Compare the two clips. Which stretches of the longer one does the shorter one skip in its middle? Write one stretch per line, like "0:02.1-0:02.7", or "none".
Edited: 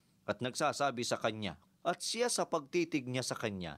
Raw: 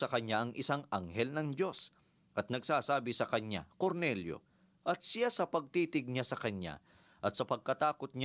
0:03.7-0:04.7